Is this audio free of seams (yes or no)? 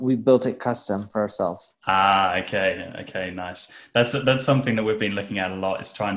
yes